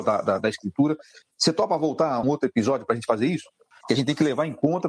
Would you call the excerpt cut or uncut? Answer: cut